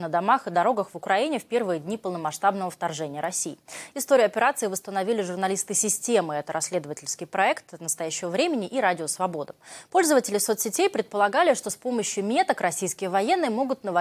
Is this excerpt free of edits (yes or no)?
yes